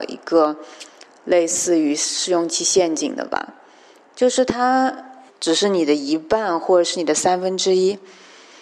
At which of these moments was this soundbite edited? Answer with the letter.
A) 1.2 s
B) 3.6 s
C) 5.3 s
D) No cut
C